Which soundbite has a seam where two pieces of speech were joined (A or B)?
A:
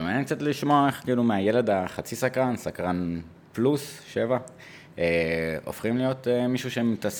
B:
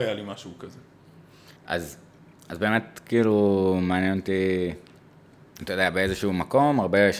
B